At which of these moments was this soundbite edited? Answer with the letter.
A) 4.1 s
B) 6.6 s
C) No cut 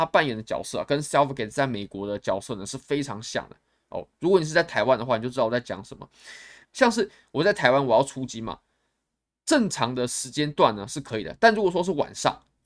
B